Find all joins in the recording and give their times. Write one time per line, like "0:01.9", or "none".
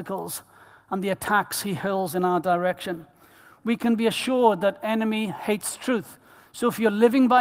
none